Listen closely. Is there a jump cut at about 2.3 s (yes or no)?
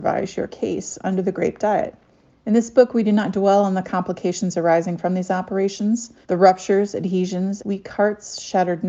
yes